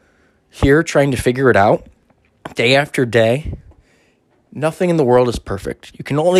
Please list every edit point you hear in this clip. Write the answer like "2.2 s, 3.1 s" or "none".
none